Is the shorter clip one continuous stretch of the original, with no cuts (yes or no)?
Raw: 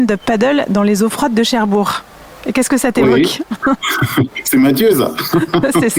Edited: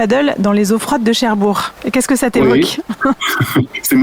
no